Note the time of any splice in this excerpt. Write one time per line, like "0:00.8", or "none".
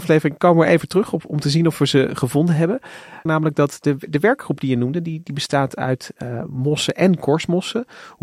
0:03.3